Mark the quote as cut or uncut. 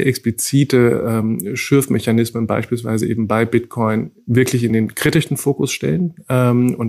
uncut